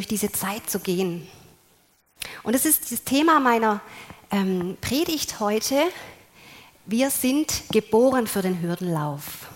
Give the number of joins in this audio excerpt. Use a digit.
0